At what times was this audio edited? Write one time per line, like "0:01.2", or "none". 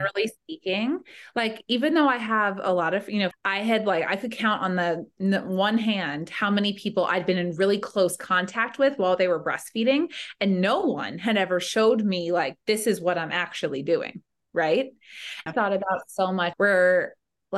0:03.3
0:15.5
0:16.5